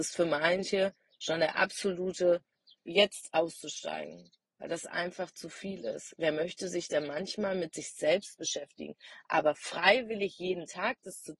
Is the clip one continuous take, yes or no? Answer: no